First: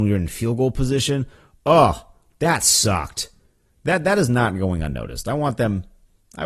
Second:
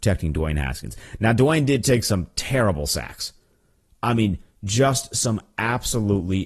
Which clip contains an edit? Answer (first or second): first